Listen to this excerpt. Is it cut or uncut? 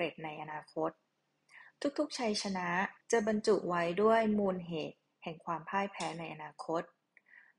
cut